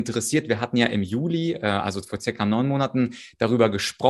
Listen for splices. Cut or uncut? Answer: uncut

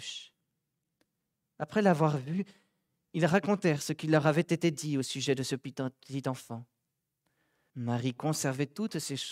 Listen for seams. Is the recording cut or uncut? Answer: cut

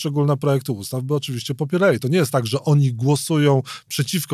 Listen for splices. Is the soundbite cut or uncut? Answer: uncut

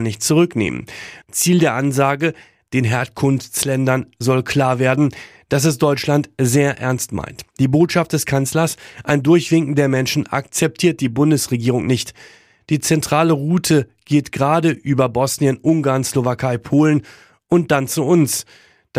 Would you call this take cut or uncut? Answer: cut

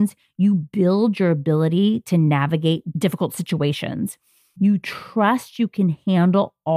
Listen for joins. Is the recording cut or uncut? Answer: uncut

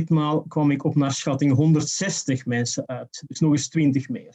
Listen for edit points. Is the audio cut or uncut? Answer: uncut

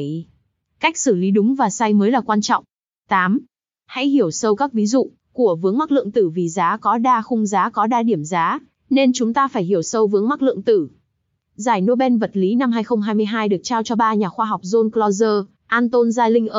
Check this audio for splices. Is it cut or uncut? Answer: cut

